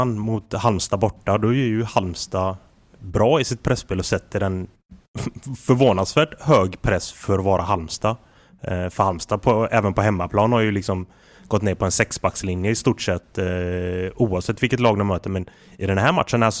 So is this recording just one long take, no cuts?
yes; 0 cuts

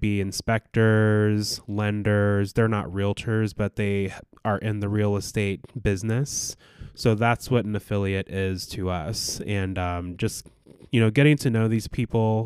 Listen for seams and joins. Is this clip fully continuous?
yes; 0 cuts

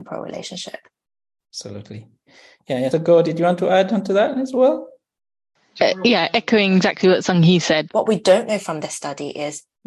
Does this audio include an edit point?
yes; 2 cuts; at 2.9 s, 7.9 s

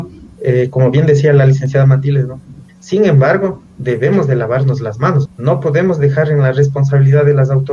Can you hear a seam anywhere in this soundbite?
yes; 2 cuts; at 2.7 s, 5.2 s

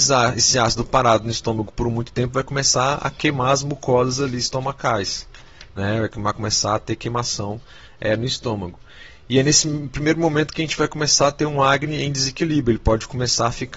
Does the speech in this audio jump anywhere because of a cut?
no; 0 cuts

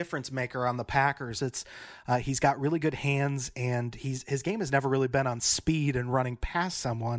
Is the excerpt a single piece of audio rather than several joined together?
no; 1 cut; at 1.4 s

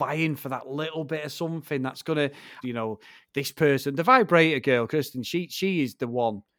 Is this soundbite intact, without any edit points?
no; 1 cut; at 2.6 s

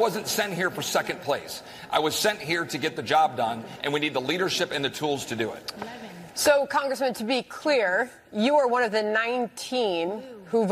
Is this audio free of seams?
yes; 0 cuts

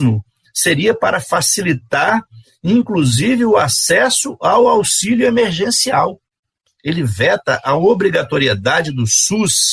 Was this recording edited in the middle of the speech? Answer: yes; 1 cut; at 6.7 s

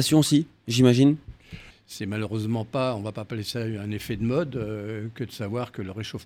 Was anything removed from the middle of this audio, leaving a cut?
yes; 1 cut; at 1.7 s

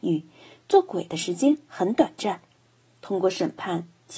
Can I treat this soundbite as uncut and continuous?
yes; 0 cuts

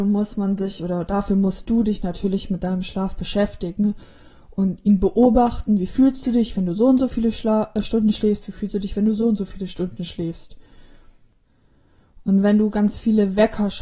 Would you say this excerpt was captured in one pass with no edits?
yes; 0 cuts

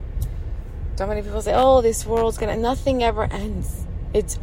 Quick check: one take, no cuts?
no; 1 cut; at 1.0 s

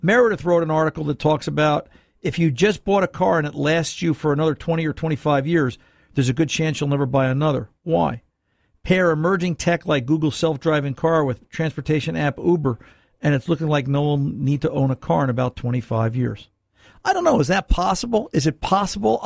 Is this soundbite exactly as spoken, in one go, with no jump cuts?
yes; 0 cuts

